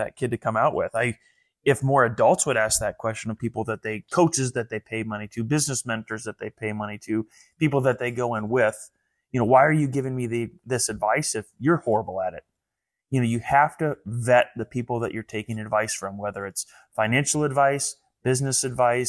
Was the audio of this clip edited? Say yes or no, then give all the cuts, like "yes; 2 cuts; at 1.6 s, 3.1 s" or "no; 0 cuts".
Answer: no; 0 cuts